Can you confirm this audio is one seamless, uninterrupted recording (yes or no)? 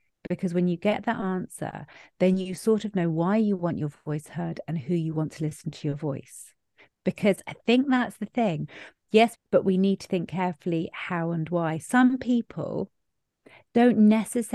no